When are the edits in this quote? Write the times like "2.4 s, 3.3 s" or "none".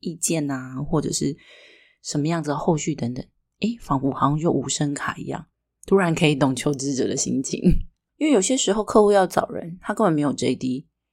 8.1 s

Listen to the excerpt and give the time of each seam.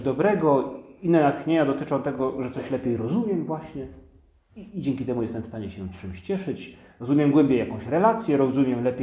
none

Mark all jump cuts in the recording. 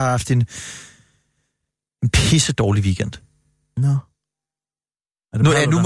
none

